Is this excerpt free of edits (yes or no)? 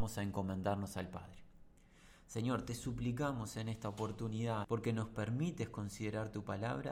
no